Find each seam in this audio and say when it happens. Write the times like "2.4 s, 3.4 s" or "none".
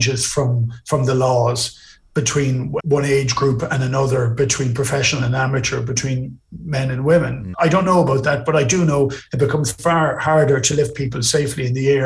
2.8 s, 7.5 s